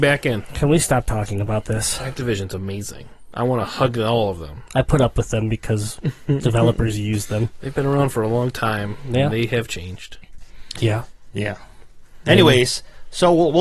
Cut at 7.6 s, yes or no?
no